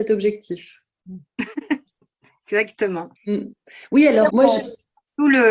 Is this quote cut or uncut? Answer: cut